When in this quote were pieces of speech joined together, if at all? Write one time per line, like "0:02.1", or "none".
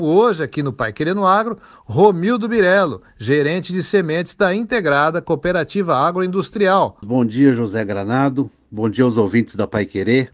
0:07.0